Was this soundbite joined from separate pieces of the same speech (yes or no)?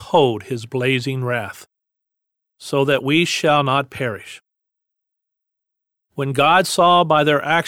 no